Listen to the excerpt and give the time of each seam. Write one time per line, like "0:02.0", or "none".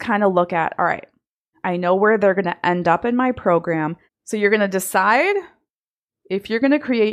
0:01.5
0:04.1